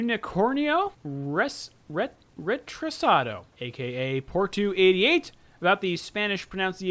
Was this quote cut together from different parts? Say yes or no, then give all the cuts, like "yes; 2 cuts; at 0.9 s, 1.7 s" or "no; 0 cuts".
yes; 2 cuts; at 0.9 s, 3.5 s